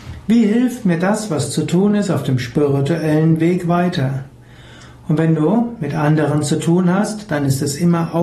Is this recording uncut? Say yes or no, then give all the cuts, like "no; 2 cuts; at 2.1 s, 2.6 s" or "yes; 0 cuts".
yes; 0 cuts